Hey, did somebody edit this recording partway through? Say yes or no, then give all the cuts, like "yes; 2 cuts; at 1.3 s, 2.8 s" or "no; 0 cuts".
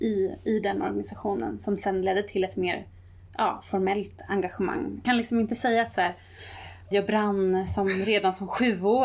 yes; 2 cuts; at 5.0 s, 6.9 s